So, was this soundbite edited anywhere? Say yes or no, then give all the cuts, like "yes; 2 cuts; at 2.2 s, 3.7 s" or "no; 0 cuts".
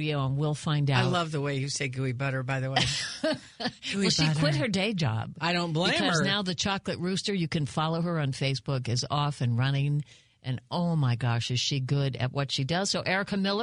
no; 0 cuts